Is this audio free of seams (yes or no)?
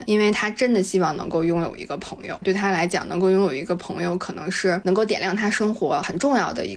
no